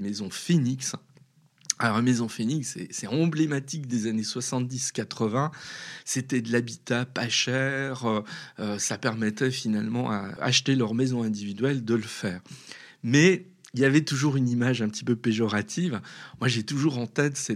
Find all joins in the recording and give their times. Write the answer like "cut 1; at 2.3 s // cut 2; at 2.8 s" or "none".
cut 1; at 10.4 s